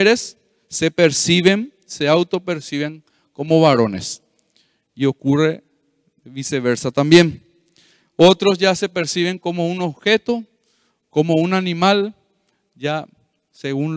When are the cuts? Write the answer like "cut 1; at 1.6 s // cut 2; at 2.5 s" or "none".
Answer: none